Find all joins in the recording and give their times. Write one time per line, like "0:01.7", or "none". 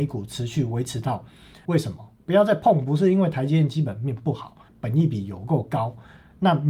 0:01.6
0:04.7